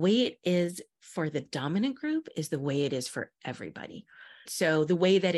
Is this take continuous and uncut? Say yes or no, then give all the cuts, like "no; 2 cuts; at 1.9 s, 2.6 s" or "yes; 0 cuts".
no; 1 cut; at 4.4 s